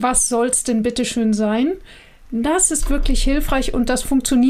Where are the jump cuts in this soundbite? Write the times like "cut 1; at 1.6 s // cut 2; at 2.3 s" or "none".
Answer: none